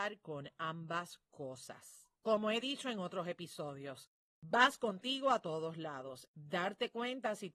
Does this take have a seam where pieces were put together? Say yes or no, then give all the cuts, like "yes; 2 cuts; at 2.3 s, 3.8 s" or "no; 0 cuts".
yes; 2 cuts; at 2.2 s, 6.3 s